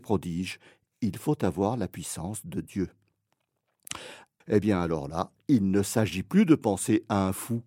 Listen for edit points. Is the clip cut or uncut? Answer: cut